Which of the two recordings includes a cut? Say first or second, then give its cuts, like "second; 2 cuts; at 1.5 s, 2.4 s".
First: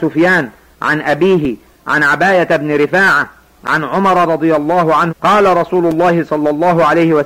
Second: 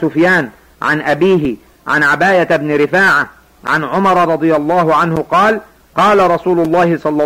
first; 1 cut; at 5.1 s